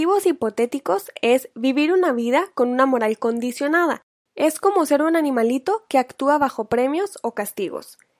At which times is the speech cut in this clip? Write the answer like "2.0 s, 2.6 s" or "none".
none